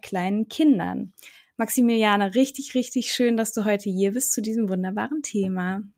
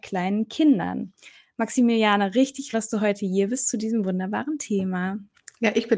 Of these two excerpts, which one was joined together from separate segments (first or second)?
second